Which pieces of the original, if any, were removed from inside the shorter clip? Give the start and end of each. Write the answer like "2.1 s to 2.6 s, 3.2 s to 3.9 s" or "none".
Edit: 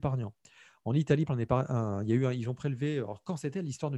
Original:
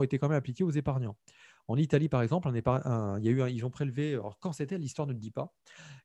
2.1 s to 2.4 s